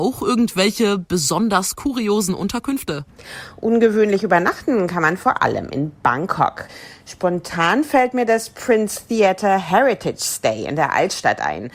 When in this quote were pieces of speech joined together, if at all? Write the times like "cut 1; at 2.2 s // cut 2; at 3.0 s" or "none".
none